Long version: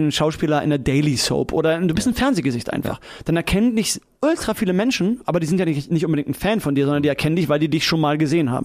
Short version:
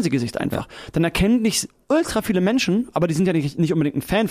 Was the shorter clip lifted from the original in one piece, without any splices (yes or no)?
yes